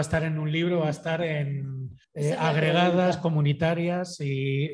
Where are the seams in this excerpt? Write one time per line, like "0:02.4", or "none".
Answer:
0:02.0